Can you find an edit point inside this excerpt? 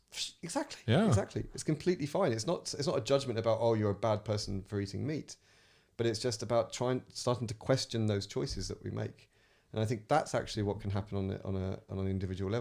no; 0 cuts

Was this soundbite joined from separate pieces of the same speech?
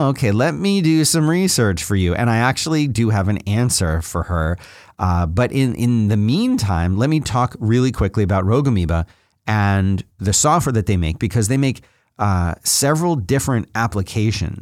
no; 0 cuts

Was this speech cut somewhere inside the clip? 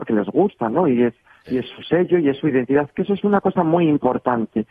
no; 0 cuts

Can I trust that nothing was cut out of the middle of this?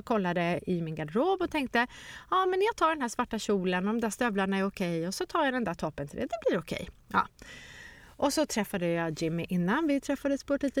yes; 0 cuts

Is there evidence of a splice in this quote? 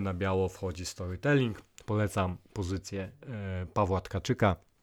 no; 0 cuts

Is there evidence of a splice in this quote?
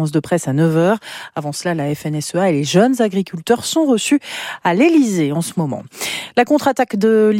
no; 0 cuts

